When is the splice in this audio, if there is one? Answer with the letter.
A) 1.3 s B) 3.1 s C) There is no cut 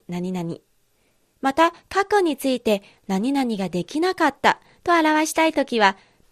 C